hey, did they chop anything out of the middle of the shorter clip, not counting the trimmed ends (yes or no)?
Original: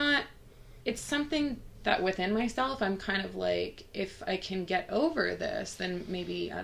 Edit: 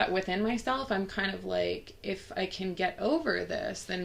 no